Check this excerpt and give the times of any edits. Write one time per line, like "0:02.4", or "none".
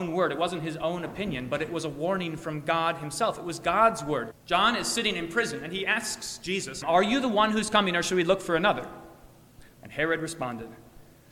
0:04.3
0:06.8
0:09.7